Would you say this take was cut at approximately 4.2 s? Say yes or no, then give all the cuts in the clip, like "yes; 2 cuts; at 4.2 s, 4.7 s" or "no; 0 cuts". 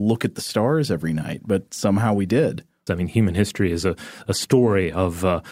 no; 1 cut; at 2.9 s